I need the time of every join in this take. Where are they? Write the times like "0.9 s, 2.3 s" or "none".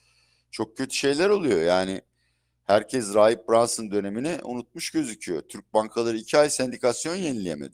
none